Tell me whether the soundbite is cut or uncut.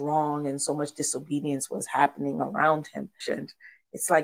cut